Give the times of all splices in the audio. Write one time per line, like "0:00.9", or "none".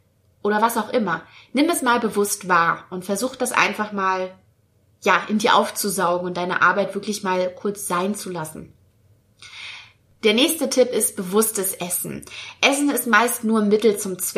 none